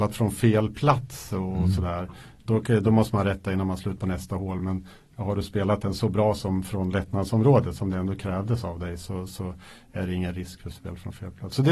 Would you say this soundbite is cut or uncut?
uncut